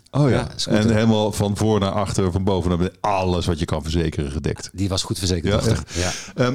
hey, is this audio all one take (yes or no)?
yes